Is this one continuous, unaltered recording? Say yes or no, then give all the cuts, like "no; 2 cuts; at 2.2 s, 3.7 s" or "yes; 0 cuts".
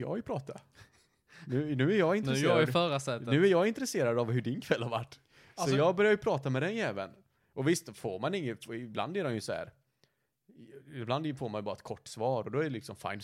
yes; 0 cuts